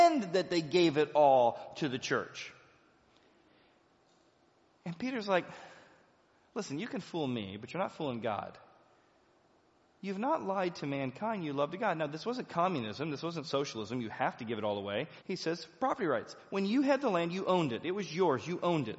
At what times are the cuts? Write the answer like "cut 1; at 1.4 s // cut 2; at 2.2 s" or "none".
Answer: cut 1; at 15.2 s